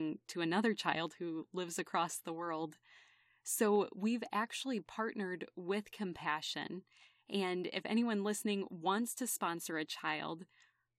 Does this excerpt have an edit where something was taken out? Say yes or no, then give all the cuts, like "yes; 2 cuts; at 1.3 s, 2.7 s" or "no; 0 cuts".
no; 0 cuts